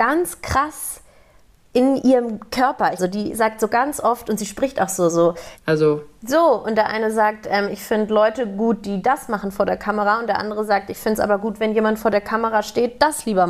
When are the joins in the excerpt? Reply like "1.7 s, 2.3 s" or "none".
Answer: 3.0 s, 5.5 s

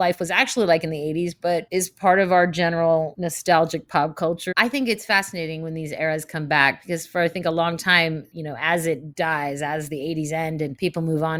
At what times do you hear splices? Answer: 4.5 s, 8.3 s

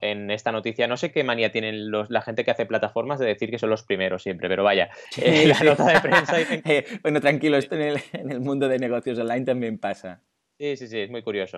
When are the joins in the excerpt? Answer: none

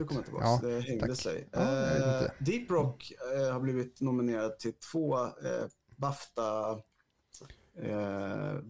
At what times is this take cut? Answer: none

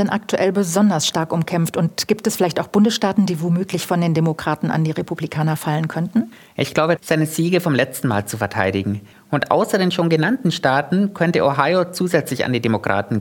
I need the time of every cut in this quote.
7.0 s, 9.1 s

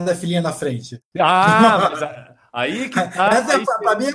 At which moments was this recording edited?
none

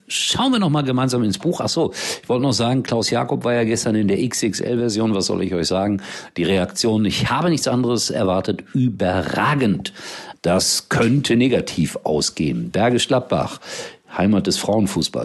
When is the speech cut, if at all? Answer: 10.3 s

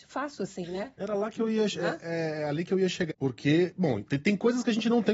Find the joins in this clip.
1.0 s, 3.1 s

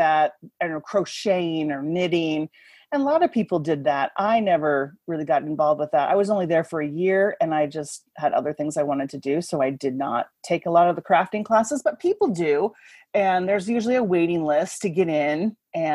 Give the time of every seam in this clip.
none

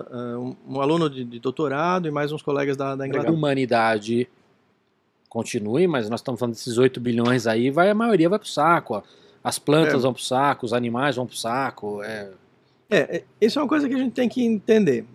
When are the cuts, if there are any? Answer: 3.3 s

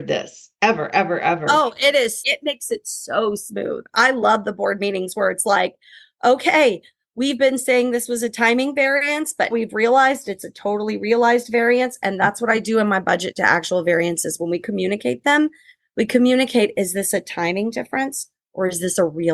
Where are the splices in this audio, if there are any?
2.2 s, 9.5 s

